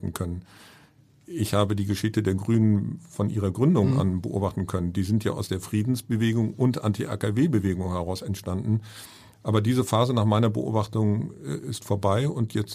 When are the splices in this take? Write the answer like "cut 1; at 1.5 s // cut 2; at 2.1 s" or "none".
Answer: cut 1; at 9.3 s